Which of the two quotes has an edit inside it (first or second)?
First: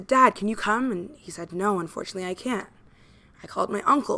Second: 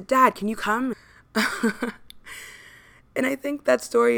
second